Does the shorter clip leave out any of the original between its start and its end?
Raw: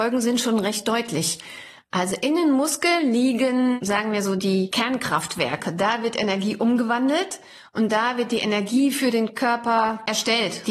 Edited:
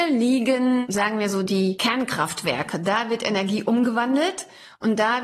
no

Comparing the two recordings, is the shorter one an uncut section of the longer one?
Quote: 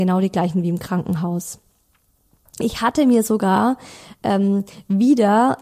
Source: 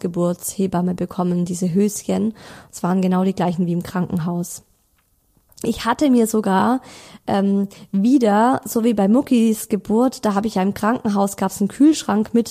yes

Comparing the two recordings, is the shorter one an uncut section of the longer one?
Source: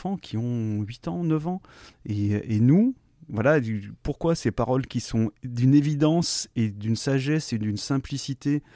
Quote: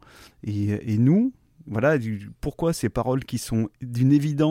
yes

